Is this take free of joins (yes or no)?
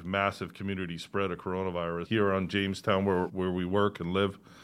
no